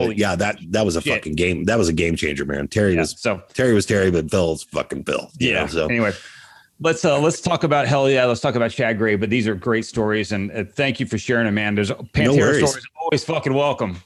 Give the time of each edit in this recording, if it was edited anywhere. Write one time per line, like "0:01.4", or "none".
none